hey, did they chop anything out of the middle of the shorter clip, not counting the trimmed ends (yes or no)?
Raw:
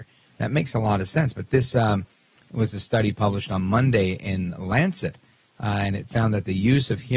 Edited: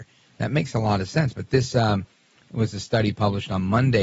no